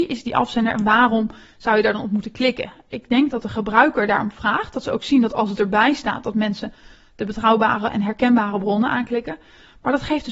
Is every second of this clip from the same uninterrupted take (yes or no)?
yes